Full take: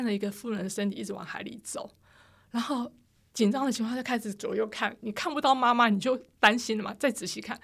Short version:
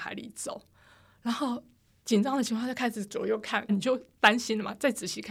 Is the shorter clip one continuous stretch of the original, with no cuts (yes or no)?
no